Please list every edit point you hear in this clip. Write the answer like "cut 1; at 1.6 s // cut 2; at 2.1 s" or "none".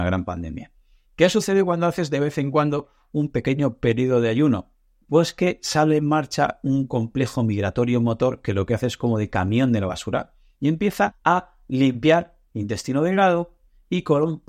cut 1; at 5.0 s // cut 2; at 11.1 s